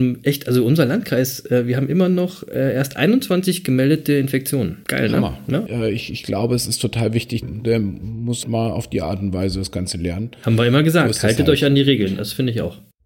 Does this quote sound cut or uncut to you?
cut